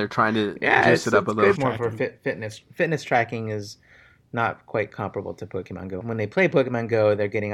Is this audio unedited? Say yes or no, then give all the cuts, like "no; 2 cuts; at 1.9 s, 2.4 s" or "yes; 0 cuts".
no; 2 cuts; at 1.6 s, 6.0 s